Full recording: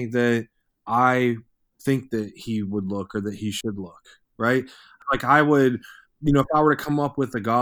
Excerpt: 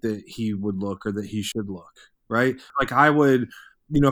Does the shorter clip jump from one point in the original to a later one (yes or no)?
yes